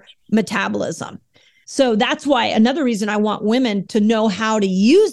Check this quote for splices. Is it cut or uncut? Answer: cut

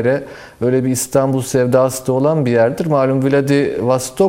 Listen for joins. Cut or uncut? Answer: uncut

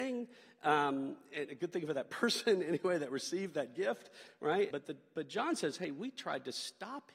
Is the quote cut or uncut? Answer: cut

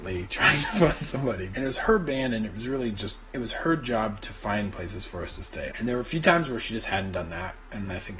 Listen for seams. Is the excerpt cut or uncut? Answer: cut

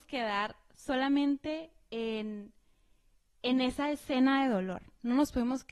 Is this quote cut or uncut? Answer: uncut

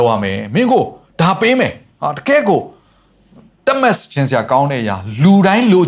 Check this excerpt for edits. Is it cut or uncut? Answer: uncut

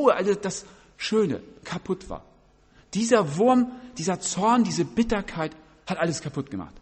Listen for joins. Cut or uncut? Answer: uncut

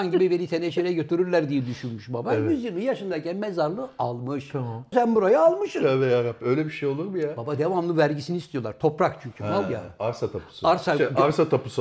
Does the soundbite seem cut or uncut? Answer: cut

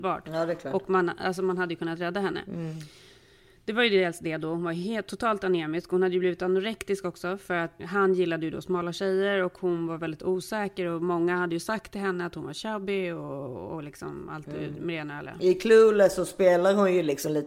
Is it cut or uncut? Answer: cut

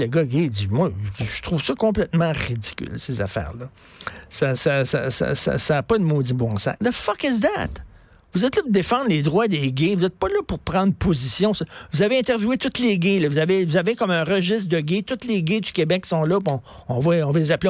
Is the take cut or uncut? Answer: cut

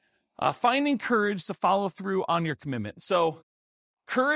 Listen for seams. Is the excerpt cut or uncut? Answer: uncut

